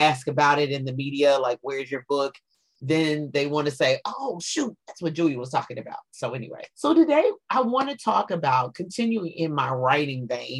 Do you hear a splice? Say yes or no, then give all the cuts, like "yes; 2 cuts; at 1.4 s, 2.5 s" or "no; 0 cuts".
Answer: yes; 1 cut; at 6.7 s